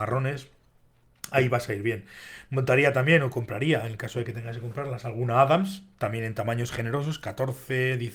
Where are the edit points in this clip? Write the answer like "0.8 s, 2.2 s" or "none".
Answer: none